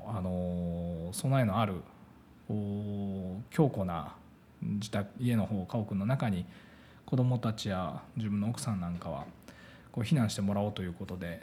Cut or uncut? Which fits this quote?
cut